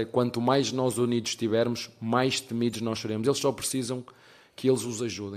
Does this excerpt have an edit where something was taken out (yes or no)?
no